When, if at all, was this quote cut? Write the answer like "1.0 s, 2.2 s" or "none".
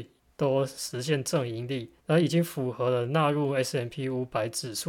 2.0 s